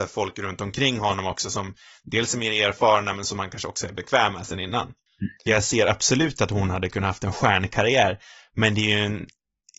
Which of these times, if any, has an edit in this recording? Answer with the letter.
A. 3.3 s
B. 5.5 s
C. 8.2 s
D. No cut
B